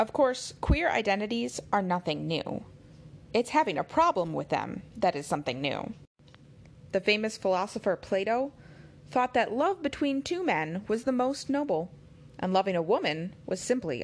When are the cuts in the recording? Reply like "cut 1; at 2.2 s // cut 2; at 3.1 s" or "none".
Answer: cut 1; at 6.9 s